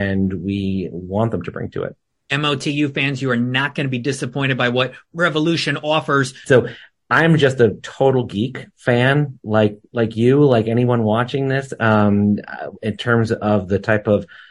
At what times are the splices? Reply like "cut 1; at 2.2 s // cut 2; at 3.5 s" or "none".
cut 1; at 6.4 s